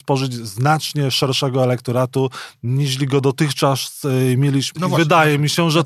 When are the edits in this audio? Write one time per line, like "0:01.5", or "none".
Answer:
0:04.7